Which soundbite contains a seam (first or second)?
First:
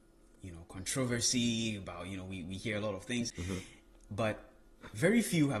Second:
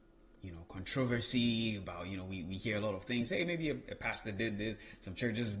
first